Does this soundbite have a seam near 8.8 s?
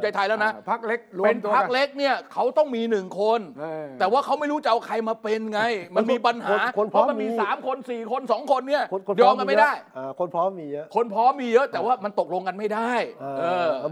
no; 0 cuts

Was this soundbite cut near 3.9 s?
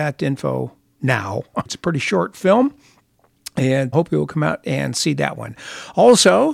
yes; 2 cuts; at 1.7 s, 3.9 s

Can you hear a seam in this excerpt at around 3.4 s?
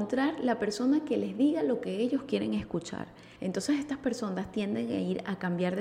yes; 1 cut; at 3.4 s

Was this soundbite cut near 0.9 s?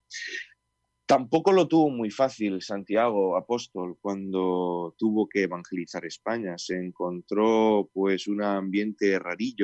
no; 0 cuts

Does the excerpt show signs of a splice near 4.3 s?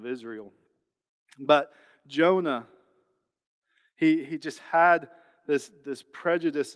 no; 0 cuts

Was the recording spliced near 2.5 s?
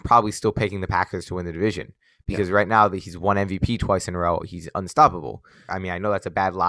no; 1 cut; at 5.7 s

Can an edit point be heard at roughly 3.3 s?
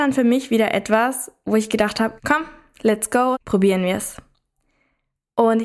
yes; 2 cuts; at 2.2 s, 3.3 s

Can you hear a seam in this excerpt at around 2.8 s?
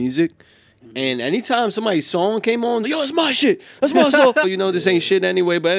yes; 2 cuts; at 2.8 s, 4.4 s

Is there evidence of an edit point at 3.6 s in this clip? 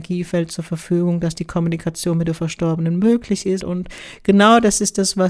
yes; 1 cut; at 3.6 s

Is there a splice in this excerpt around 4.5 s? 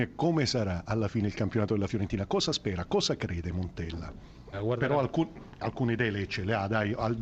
yes; 1 cut; at 4.5 s

